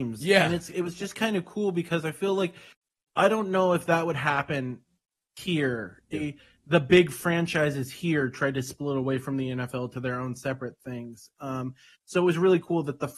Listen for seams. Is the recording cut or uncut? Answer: cut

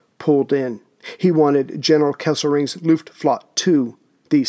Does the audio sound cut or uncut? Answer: cut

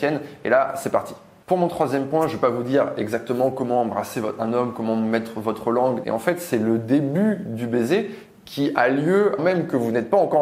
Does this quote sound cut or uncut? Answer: cut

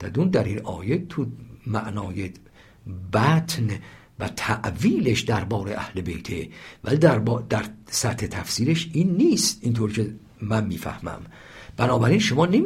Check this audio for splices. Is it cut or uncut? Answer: uncut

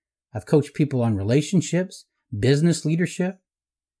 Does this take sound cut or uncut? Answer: uncut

